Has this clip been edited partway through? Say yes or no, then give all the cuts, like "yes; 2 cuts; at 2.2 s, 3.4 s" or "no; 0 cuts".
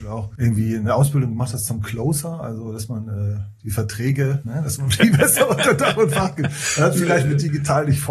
no; 0 cuts